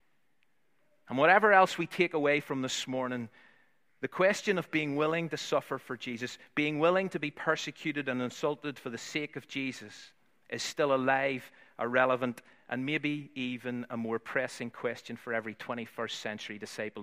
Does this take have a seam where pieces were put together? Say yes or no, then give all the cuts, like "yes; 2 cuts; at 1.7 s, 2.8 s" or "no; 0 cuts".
no; 0 cuts